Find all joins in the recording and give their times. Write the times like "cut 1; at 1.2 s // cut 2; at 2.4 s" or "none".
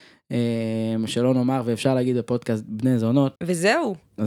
cut 1; at 3.4 s